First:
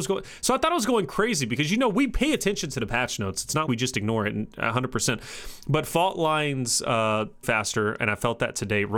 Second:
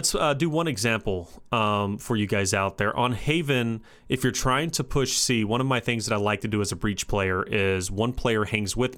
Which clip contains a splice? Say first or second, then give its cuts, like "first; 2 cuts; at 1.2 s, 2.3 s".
first; 2 cuts; at 3.7 s, 7.4 s